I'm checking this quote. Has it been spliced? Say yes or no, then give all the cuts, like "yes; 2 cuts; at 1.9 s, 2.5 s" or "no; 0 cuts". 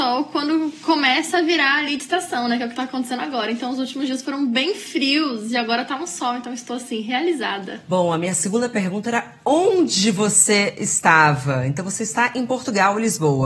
no; 0 cuts